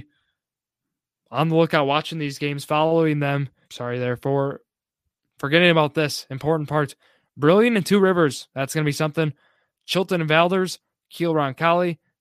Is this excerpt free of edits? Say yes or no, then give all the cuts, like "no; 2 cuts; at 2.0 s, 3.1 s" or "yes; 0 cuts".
no; 1 cut; at 3.6 s